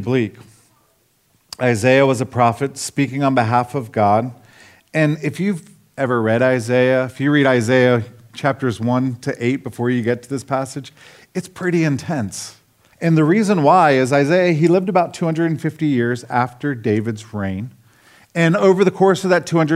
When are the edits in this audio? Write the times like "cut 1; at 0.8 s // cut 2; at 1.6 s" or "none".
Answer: cut 1; at 12.9 s